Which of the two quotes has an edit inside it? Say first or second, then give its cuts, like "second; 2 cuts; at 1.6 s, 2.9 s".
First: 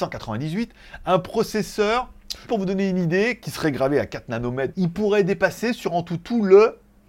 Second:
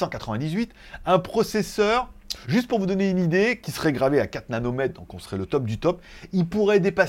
first; 2 cuts; at 2.5 s, 4.7 s